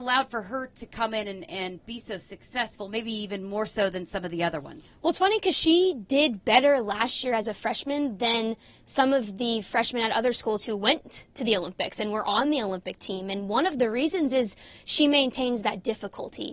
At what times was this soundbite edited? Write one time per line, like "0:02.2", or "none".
none